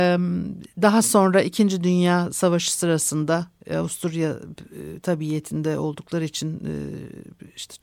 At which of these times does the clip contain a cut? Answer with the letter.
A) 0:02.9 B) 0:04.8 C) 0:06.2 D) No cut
D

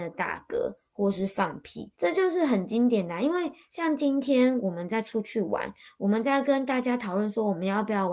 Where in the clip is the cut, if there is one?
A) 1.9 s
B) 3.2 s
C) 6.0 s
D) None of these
A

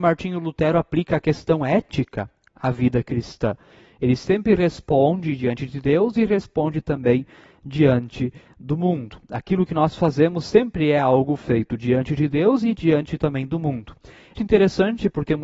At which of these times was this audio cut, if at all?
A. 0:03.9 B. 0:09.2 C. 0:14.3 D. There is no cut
C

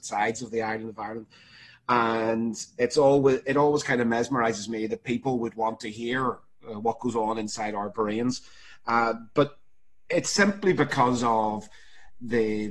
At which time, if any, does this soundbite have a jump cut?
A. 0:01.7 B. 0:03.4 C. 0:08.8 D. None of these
D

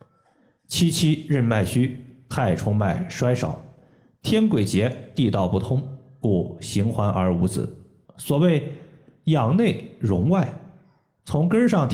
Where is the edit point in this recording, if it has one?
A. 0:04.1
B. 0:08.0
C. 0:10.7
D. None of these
B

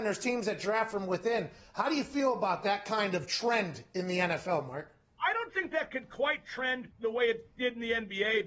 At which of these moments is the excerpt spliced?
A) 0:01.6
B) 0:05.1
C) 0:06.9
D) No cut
C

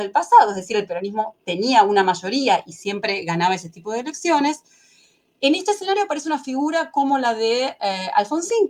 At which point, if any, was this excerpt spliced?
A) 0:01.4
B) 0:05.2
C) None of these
A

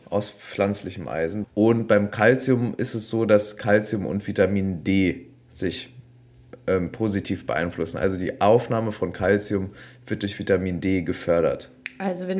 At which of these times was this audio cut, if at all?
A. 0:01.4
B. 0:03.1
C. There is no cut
A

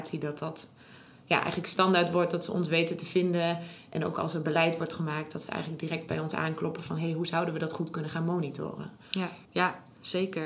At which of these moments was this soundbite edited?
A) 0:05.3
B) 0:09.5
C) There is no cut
B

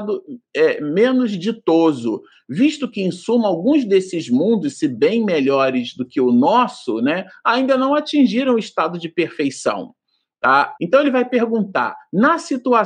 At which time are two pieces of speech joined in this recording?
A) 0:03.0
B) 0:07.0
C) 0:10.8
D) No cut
C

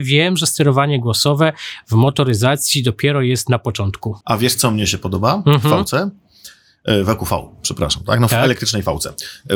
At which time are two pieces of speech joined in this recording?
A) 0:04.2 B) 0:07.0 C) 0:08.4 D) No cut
A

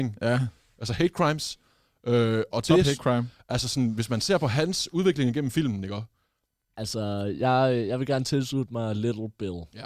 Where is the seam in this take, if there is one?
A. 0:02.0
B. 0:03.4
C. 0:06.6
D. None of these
C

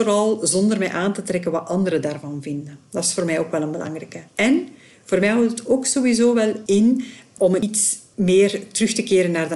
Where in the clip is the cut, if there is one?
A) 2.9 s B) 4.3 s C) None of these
B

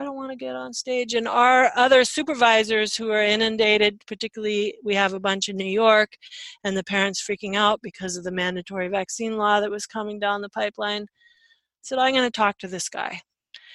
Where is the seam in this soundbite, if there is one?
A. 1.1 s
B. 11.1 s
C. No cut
C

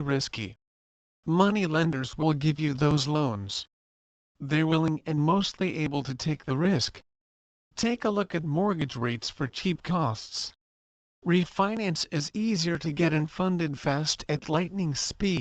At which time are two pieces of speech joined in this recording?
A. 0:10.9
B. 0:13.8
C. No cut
B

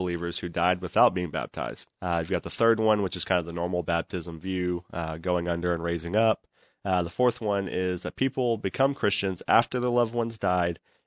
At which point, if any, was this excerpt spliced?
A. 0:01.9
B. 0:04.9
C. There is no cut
A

